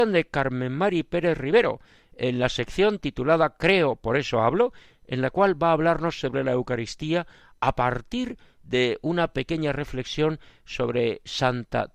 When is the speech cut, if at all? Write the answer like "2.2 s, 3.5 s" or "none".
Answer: none